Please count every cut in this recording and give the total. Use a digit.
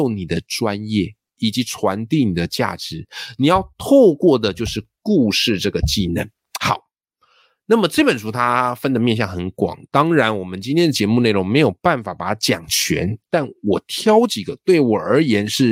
0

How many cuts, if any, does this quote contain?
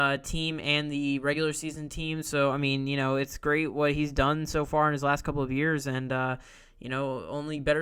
0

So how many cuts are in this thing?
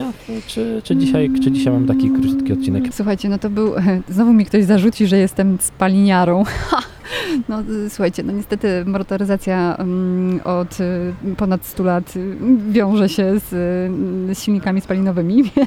1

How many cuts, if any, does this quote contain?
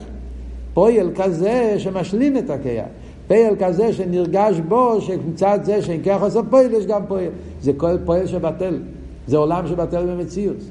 0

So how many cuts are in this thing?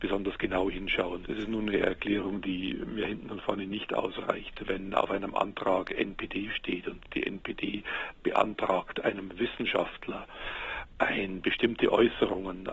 1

